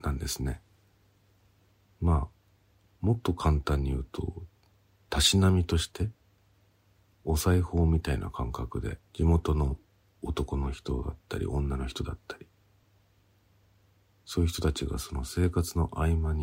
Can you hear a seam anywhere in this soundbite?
yes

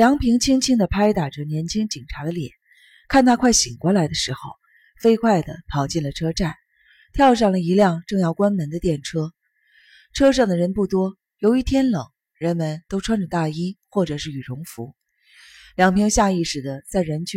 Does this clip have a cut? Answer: no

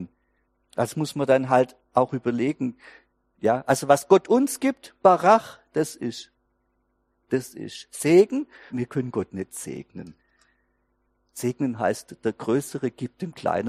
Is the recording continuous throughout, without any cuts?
no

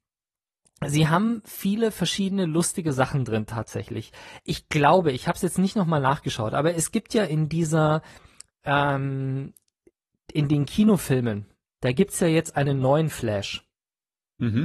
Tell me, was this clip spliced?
no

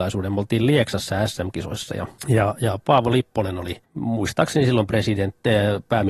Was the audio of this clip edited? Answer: yes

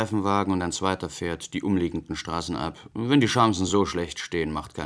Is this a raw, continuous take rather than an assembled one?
yes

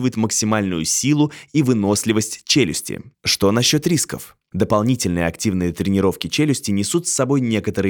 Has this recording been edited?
yes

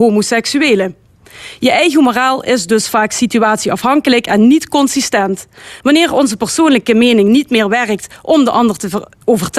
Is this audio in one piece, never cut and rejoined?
yes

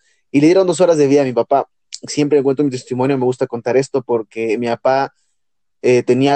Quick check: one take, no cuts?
yes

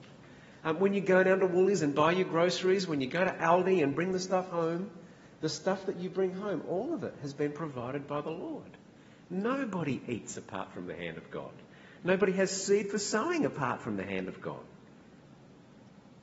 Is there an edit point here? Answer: no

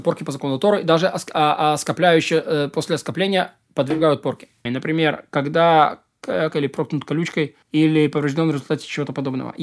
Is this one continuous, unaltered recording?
no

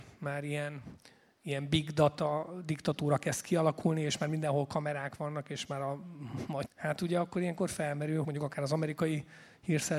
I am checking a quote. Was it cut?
yes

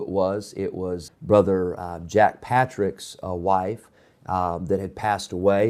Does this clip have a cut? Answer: yes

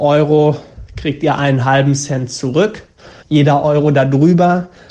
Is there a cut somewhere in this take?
yes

